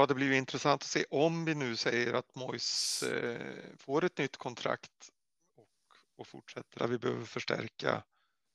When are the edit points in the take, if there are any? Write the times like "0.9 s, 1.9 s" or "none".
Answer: 6.8 s